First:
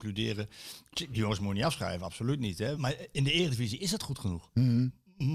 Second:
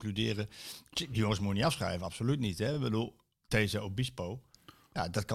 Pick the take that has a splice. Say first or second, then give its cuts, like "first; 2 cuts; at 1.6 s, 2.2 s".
first; 1 cut; at 2.7 s